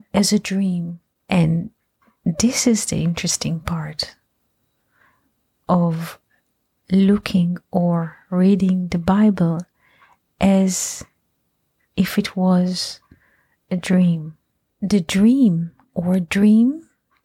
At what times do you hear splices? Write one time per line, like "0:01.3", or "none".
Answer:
0:01.2